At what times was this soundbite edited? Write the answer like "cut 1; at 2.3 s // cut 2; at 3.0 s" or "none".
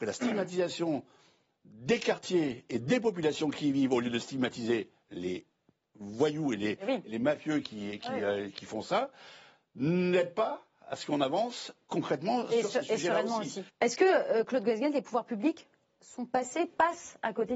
cut 1; at 13.7 s